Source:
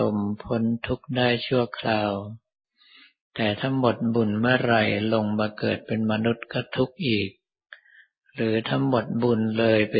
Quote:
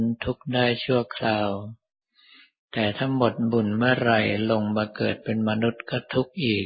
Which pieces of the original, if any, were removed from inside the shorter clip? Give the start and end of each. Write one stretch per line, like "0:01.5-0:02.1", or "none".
none